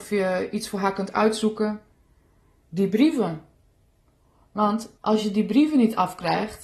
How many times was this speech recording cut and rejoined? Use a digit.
2